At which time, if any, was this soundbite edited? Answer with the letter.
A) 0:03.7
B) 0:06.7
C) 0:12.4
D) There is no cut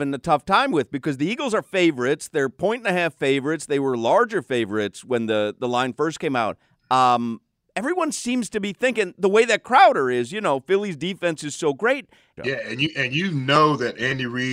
C